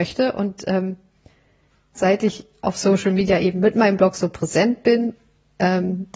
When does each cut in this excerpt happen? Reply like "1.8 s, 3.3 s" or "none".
1.9 s